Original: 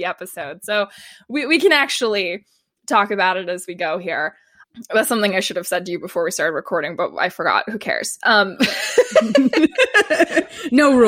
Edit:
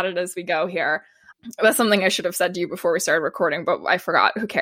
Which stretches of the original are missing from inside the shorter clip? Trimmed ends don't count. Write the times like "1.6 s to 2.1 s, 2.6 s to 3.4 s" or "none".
none